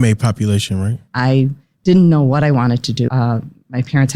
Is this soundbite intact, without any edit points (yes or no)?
no